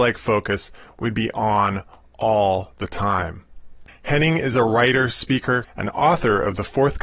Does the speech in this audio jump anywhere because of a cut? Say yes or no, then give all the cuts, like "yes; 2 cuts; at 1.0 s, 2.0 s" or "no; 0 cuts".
yes; 2 cuts; at 3.9 s, 5.6 s